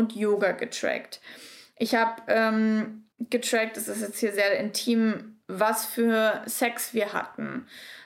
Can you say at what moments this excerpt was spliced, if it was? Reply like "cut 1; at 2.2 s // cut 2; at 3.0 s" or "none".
cut 1; at 3.1 s